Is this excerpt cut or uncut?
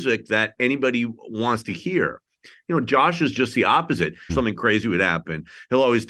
cut